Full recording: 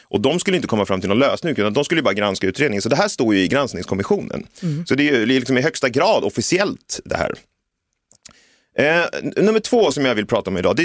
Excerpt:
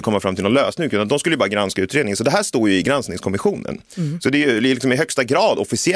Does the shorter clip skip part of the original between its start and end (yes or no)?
no